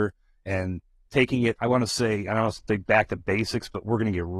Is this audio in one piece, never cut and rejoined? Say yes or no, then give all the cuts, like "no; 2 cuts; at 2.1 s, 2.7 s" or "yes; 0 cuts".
no; 1 cut; at 1.6 s